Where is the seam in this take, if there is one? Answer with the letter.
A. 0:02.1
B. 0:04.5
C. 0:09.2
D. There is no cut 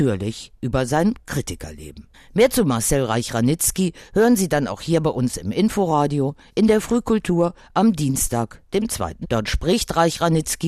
C